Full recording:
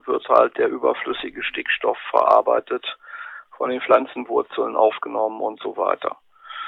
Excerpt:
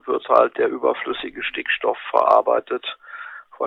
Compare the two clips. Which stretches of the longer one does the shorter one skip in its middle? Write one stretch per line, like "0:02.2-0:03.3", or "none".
none